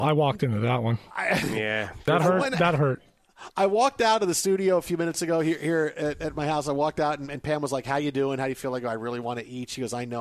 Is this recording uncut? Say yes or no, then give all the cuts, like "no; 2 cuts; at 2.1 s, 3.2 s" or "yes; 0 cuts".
yes; 0 cuts